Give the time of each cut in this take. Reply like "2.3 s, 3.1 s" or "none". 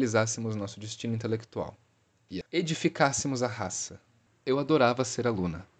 2.4 s, 4.3 s